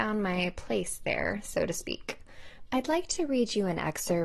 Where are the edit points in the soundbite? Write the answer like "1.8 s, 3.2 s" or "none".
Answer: 2.7 s